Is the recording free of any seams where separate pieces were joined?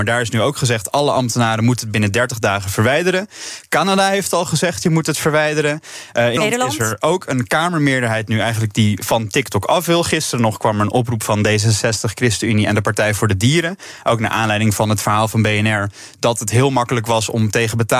no; 1 cut; at 6.4 s

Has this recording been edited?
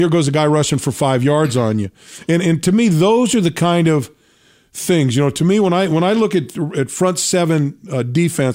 no; 0 cuts

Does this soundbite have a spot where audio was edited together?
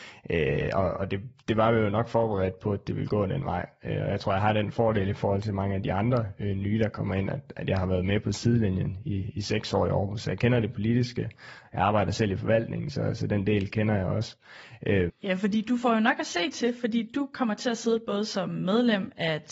yes; 1 cut; at 15.1 s

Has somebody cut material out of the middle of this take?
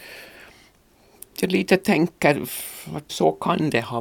yes; 1 cut; at 3.1 s

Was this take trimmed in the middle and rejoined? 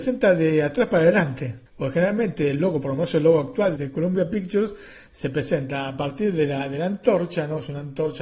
yes; 2 cuts; at 1.7 s, 3.8 s

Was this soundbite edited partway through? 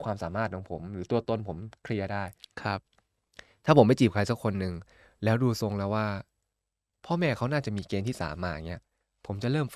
no; 0 cuts

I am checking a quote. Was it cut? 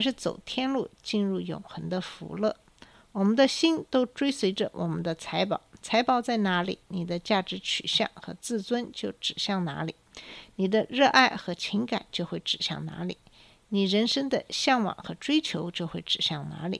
no; 0 cuts

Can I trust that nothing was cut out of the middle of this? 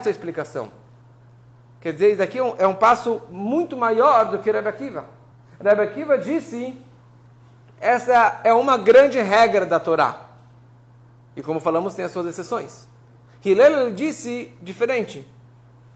yes; 0 cuts

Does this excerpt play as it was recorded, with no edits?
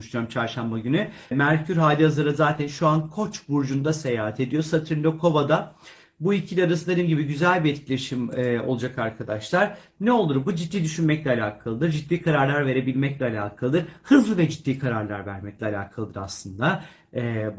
no; 1 cut; at 1.3 s

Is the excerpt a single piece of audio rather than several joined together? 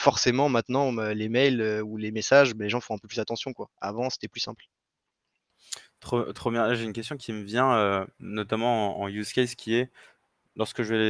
yes; 0 cuts

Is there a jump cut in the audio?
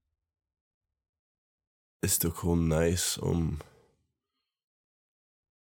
no; 0 cuts

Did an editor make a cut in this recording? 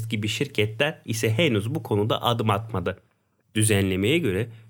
yes; 1 cut; at 3.4 s

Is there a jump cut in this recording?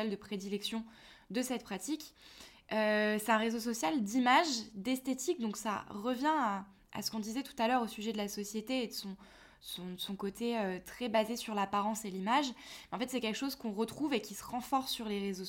no; 0 cuts

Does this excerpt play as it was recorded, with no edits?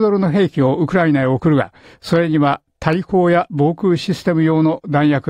yes; 0 cuts

